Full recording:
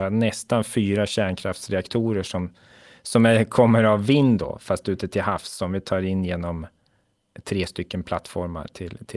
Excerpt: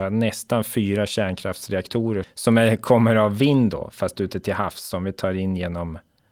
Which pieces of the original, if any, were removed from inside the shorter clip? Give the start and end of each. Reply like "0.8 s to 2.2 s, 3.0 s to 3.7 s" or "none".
2.2 s to 2.9 s